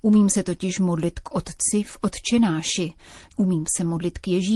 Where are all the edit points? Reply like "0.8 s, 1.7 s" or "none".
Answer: 3.3 s

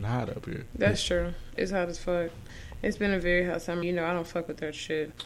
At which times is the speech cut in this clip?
1.6 s, 3.8 s

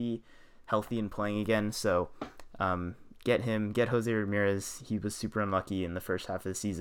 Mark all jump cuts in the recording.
none

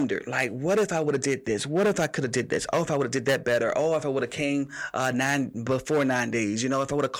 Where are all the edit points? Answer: none

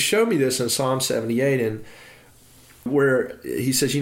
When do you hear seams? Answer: none

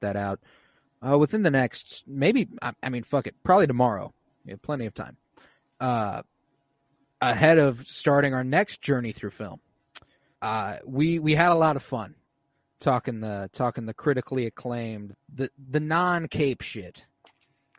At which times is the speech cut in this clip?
10.3 s, 15.1 s

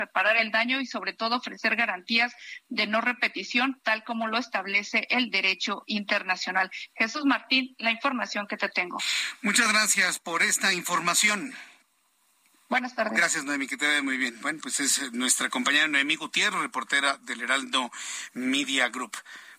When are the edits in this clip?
none

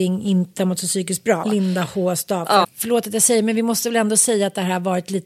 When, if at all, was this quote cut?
1.4 s, 2.6 s

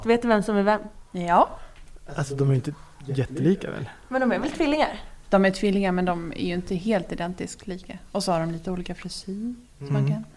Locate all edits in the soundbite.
none

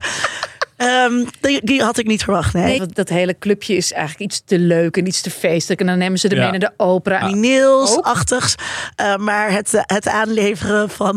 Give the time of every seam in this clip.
2.8 s, 7.2 s

